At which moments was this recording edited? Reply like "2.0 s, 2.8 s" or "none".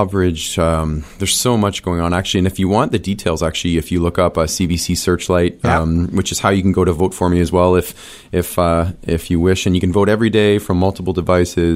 none